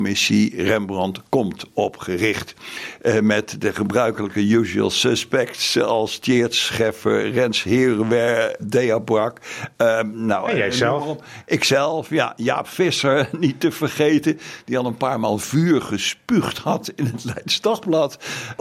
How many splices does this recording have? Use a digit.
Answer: 1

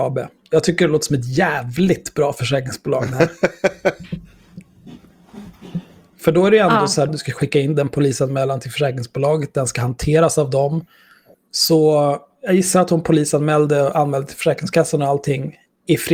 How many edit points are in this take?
2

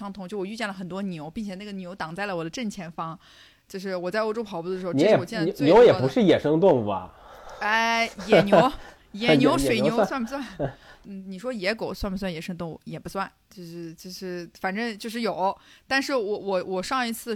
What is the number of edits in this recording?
1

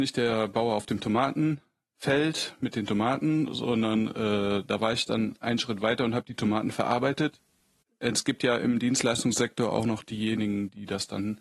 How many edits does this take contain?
0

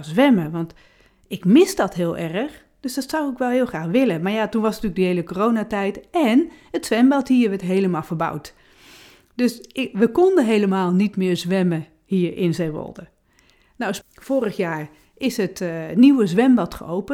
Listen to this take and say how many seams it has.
1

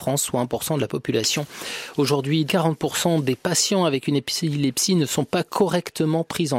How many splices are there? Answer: 1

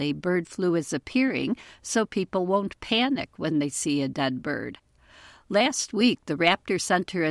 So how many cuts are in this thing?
0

